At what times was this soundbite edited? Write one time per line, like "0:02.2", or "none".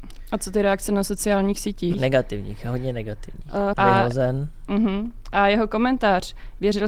0:01.9
0:03.7